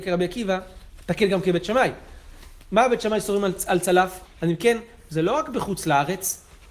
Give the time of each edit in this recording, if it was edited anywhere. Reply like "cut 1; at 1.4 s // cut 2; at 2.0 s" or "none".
cut 1; at 4.3 s